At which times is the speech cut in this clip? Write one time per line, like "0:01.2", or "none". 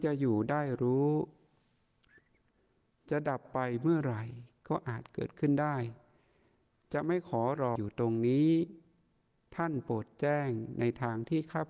0:07.8